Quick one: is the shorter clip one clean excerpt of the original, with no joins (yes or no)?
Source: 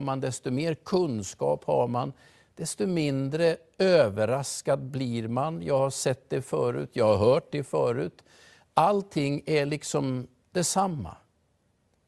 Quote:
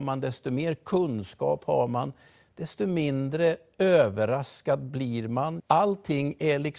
no